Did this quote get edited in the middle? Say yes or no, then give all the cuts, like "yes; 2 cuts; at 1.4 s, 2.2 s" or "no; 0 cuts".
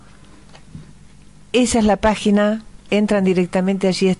no; 0 cuts